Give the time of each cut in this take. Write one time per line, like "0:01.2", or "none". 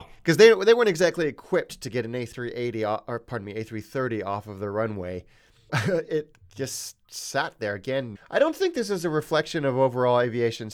0:05.7
0:08.2